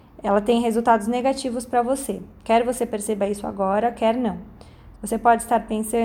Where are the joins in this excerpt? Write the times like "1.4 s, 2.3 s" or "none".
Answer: 4.9 s